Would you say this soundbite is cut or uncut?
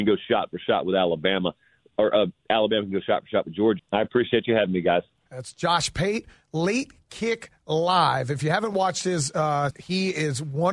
cut